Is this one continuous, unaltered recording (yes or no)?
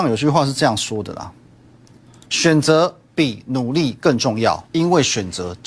no